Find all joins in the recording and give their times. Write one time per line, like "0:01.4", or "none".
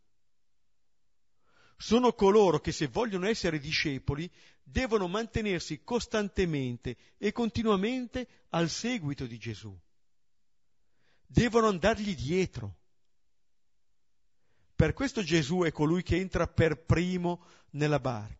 none